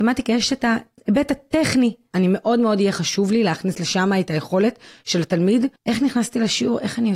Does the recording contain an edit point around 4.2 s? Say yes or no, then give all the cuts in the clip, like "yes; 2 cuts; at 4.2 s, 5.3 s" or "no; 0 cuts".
no; 2 cuts; at 2.1 s, 5.8 s